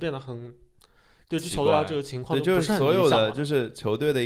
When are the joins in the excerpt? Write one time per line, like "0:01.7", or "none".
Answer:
none